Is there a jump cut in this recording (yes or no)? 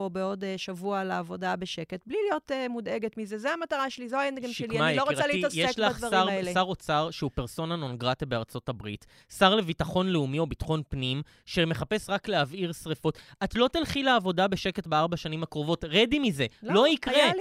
no